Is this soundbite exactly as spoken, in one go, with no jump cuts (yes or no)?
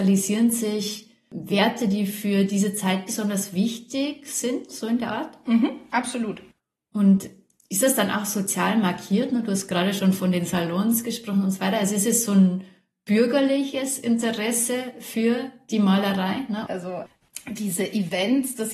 no